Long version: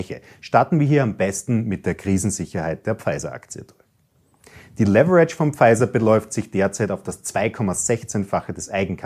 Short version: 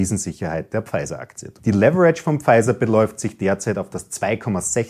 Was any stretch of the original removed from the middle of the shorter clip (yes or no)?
yes